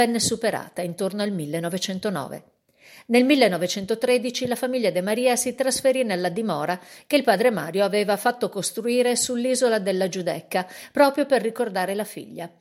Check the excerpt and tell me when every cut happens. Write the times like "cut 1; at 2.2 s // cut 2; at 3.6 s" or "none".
none